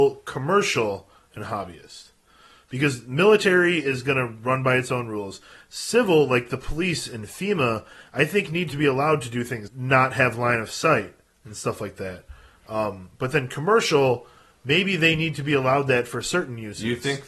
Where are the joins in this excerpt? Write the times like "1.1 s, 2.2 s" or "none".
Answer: 9.7 s